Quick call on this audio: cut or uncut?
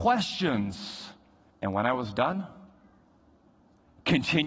cut